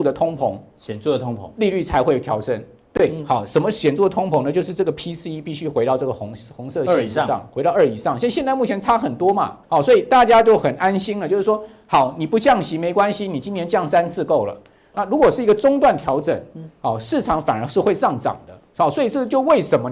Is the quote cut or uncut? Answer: cut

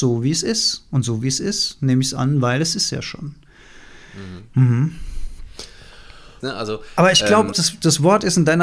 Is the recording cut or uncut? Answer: cut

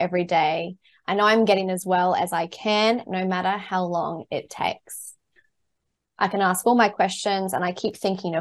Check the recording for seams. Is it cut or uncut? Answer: cut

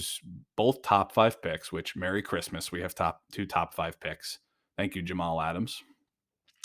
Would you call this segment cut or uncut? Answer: uncut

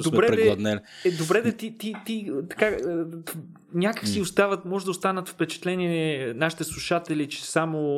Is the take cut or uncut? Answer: uncut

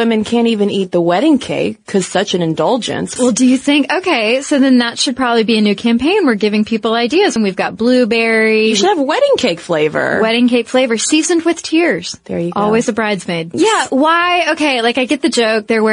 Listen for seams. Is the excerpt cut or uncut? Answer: cut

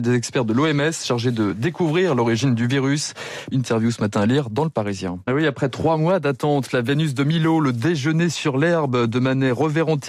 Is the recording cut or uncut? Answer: cut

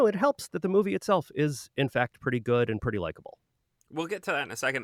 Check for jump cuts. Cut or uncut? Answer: uncut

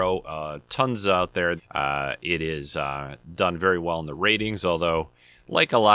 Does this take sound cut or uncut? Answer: cut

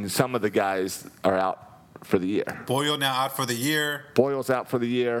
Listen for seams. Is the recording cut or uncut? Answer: uncut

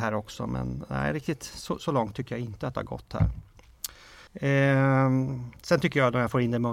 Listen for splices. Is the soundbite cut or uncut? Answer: cut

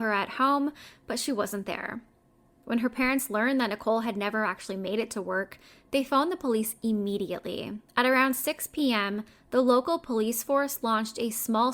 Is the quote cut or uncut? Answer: cut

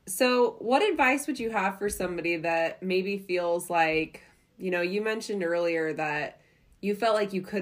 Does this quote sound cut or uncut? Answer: uncut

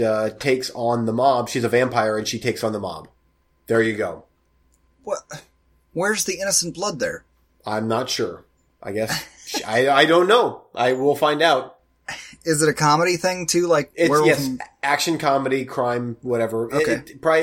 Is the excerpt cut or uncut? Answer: uncut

